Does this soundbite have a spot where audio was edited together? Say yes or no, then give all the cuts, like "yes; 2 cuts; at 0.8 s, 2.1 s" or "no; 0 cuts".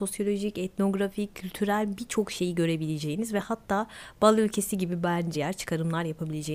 yes; 1 cut; at 5.3 s